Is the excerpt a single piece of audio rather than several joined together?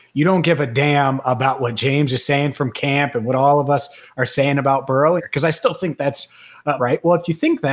no; 2 cuts; at 5.2 s, 6.8 s

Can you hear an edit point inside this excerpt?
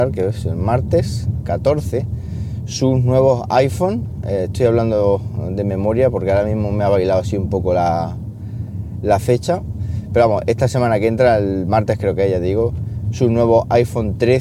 no; 0 cuts

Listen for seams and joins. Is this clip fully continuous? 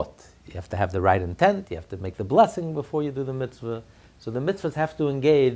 yes; 0 cuts

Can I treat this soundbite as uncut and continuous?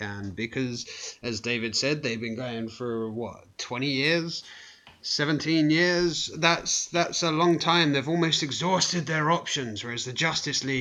yes; 0 cuts

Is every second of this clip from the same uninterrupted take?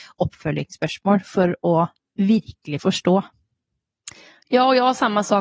yes; 0 cuts

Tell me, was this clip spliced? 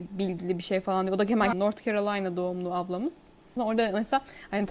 yes; 2 cuts; at 1.5 s, 3.6 s

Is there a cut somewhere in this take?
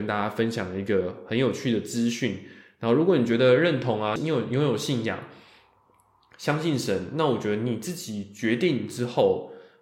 yes; 1 cut; at 4.2 s

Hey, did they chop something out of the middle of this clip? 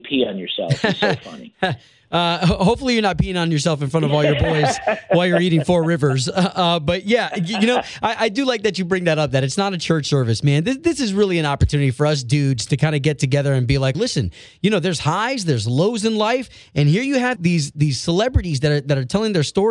yes; 2 cuts; at 13.9 s, 17.4 s

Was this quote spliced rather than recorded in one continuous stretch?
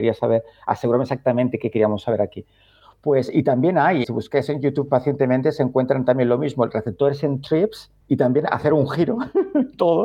yes; 2 cuts; at 4.0 s, 8.0 s

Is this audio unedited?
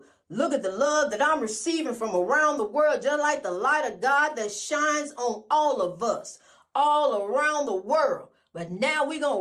yes; 0 cuts

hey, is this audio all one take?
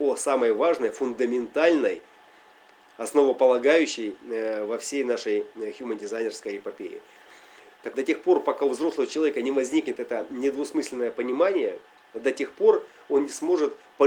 no; 1 cut; at 7.9 s

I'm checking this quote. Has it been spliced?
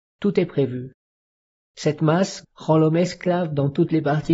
yes; 1 cut; at 2.4 s

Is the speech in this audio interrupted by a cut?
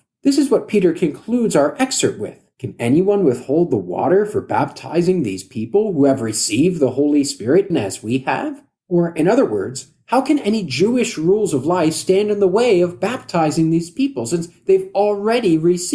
yes; 1 cut; at 7.7 s

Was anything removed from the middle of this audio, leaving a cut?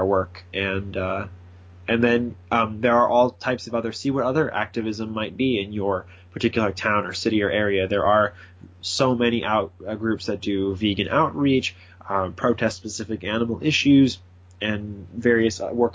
no; 0 cuts

